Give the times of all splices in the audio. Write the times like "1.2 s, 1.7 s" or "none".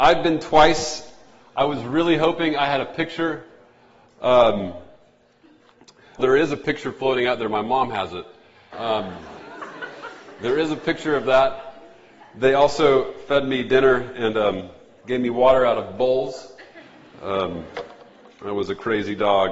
6.2 s, 8.7 s